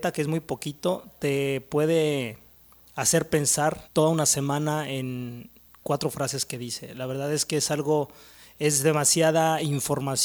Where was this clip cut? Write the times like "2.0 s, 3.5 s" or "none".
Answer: 3.9 s